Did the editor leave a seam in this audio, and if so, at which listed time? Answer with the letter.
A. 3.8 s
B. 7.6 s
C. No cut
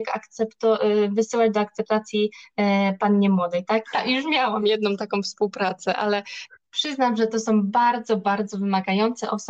A